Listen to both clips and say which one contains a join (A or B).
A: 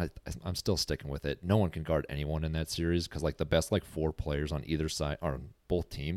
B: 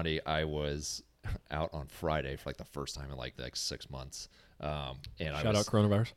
B